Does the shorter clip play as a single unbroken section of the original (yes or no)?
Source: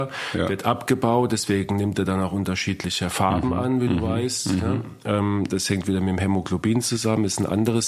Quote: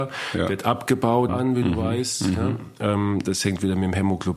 no